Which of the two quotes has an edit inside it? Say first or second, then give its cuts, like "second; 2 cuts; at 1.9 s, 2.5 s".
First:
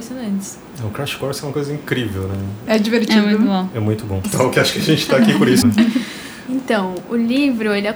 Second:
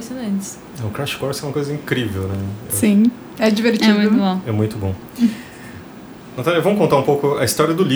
first; 3 cuts; at 2.7 s, 4.2 s, 5.6 s